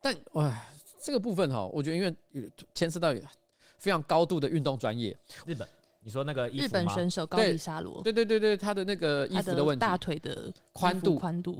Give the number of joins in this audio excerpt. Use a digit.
1